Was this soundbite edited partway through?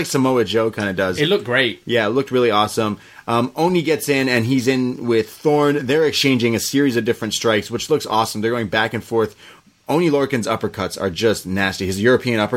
no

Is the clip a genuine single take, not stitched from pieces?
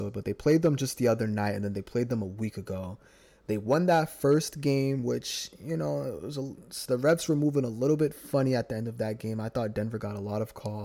yes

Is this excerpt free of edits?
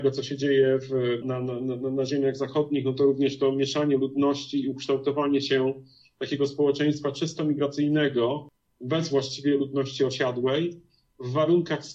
no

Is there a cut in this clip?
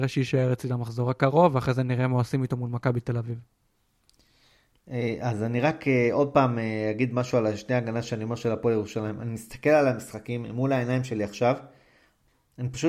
no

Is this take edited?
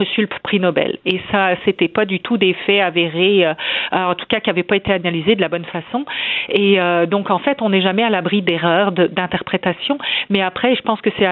yes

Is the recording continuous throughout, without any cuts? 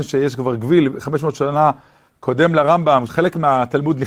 no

